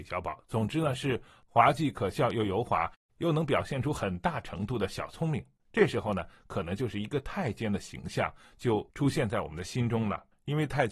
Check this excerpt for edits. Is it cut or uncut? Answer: uncut